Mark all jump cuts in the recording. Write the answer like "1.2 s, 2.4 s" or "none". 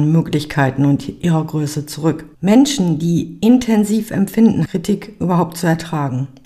2.3 s, 4.7 s